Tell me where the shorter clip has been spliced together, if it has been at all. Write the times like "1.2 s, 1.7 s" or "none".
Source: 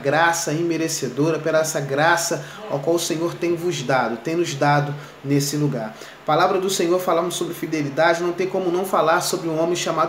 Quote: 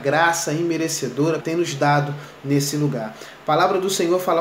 1.4 s